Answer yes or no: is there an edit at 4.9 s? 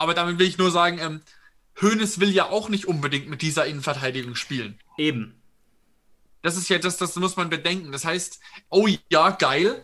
no